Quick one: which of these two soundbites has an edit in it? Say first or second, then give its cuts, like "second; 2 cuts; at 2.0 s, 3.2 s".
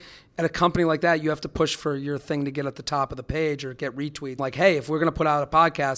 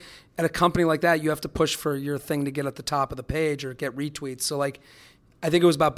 first; 1 cut; at 4.4 s